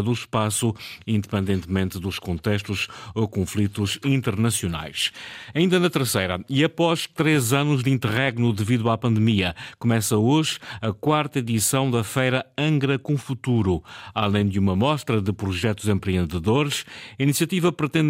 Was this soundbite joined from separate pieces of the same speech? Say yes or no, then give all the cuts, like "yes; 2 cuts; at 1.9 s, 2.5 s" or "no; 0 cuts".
no; 0 cuts